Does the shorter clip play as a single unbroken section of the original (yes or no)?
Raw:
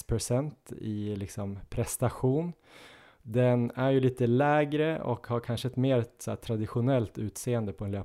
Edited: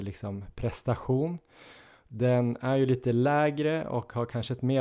yes